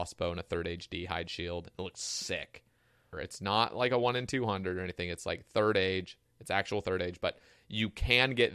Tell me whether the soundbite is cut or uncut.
cut